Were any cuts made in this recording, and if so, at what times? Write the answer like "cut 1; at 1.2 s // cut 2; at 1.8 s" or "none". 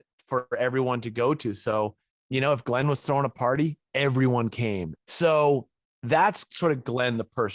cut 1; at 5.0 s